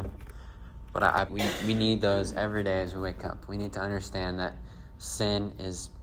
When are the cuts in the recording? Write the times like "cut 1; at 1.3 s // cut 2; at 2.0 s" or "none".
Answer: cut 1; at 1.3 s